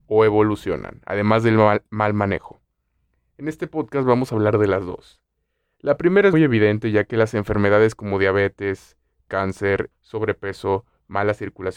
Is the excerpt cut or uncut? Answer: cut